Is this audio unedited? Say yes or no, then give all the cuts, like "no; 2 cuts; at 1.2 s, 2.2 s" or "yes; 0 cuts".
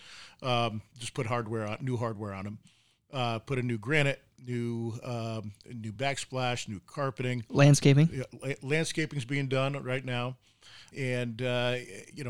no; 1 cut; at 10.9 s